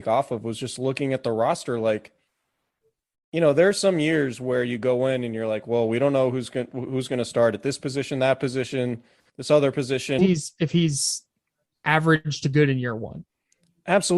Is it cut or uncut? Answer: cut